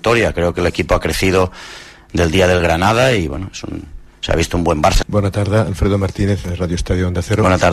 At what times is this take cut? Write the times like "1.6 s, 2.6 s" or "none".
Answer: 5.0 s